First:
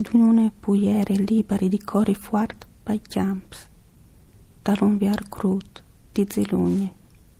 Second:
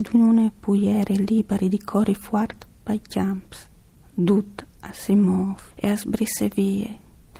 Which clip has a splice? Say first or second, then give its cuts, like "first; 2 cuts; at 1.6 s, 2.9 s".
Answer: second; 2 cuts; at 4.0 s, 5.7 s